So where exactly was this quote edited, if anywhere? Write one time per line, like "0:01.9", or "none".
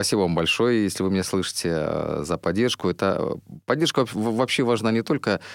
none